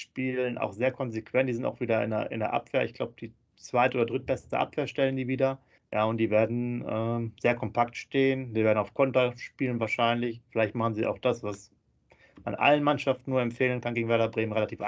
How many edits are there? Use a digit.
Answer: 1